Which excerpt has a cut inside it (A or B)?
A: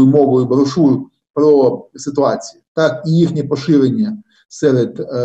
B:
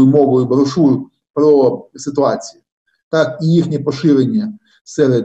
A